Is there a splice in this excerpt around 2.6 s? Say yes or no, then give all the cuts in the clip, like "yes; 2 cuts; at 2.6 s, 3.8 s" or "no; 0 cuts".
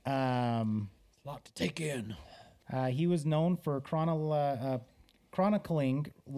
yes; 1 cut; at 2.6 s